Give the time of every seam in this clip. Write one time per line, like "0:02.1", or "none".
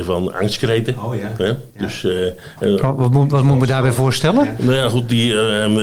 none